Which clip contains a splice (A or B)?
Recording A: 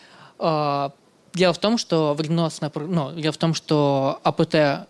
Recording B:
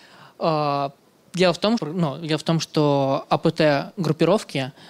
B